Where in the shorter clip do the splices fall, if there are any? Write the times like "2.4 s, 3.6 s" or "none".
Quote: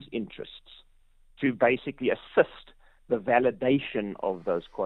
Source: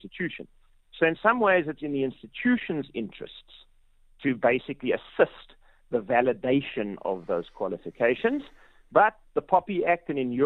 none

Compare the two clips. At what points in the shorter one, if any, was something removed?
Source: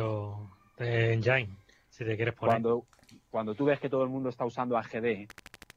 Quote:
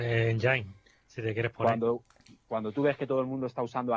none

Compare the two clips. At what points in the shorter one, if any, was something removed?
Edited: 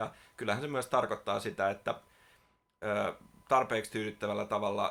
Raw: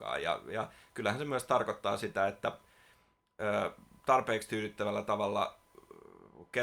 none

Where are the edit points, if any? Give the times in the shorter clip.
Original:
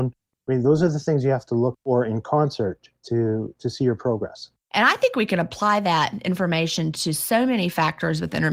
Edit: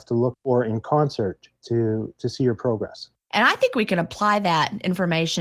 none

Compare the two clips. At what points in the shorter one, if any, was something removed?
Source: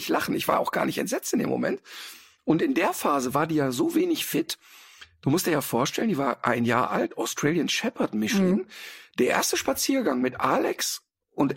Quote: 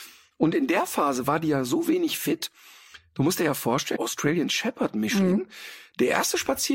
4.0 s

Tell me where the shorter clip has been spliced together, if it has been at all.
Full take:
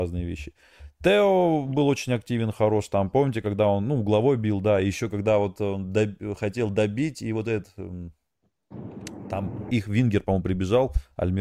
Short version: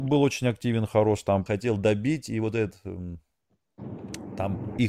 1.5 s

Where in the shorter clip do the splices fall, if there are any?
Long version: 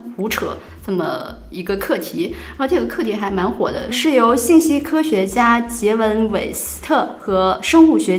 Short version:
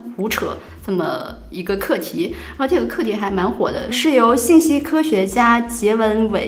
none

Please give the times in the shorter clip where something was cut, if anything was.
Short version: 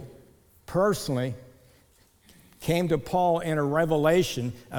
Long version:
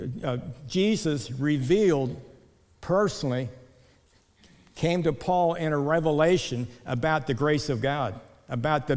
none

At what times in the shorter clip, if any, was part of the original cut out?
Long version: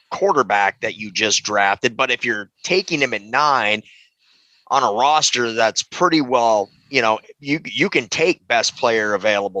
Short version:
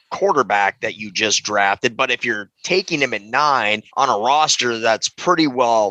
3.9 s

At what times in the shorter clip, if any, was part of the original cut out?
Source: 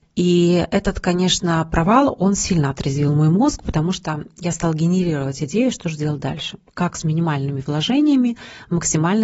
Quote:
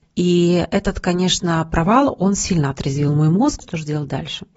3.6 s

